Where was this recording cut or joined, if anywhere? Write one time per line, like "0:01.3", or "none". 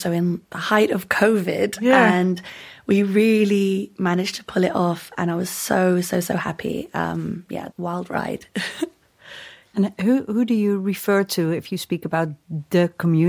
0:07.7